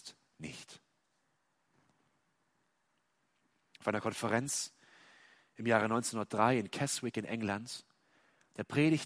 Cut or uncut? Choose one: uncut